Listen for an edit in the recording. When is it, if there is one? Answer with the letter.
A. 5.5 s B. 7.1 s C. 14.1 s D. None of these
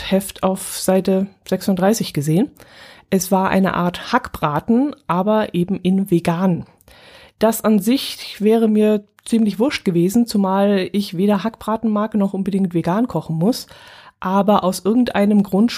D